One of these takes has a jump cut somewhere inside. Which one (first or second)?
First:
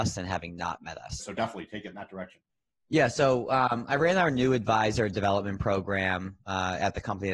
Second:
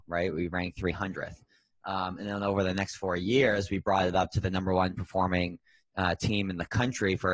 first